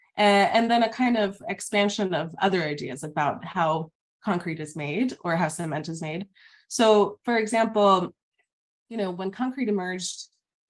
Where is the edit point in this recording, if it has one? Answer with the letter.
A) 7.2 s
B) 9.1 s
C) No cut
C